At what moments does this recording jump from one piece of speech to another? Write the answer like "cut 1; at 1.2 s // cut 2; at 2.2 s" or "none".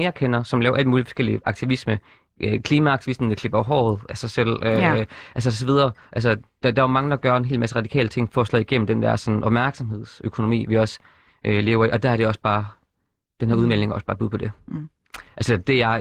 none